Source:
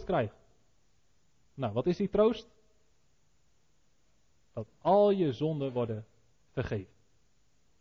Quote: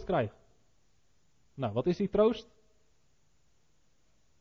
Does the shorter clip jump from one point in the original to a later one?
no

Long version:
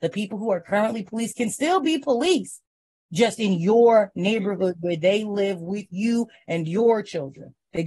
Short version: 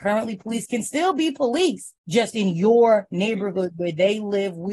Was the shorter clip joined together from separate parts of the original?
yes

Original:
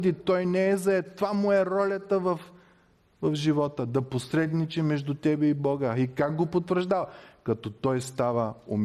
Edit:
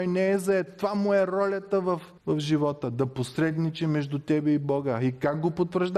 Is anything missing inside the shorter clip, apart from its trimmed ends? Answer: yes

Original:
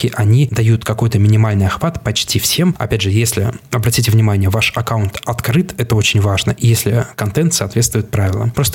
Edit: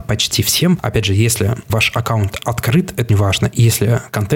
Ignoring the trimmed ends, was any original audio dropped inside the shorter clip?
yes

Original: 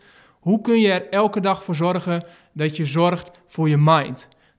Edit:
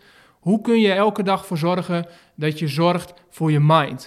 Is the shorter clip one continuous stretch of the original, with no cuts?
no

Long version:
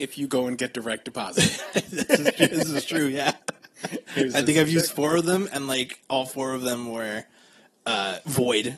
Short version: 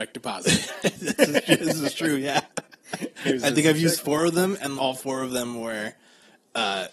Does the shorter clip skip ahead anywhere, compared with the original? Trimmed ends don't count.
yes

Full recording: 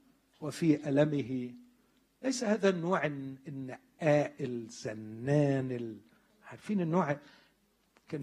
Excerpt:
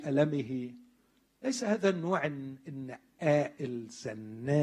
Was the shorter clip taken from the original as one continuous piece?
yes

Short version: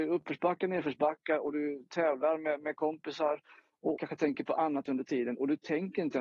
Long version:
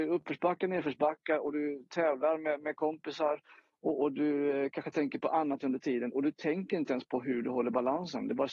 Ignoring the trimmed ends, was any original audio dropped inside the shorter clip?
yes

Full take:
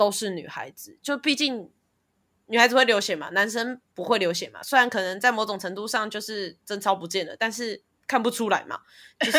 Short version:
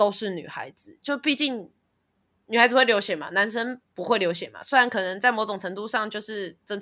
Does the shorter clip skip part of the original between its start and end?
no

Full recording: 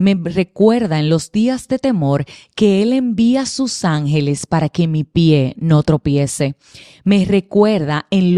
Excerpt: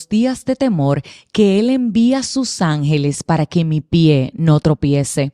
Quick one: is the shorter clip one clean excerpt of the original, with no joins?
yes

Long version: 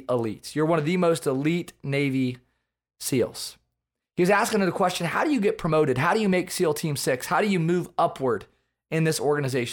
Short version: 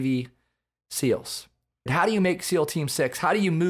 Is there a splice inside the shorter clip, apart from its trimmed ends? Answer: yes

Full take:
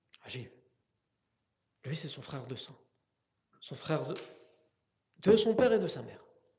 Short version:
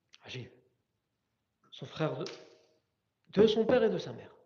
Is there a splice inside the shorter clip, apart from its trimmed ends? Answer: yes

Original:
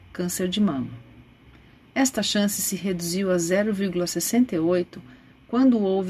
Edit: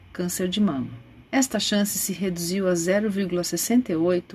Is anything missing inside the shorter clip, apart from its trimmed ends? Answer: yes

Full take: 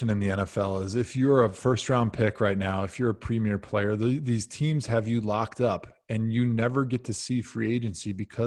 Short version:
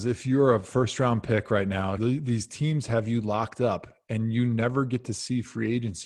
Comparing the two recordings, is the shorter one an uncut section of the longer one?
no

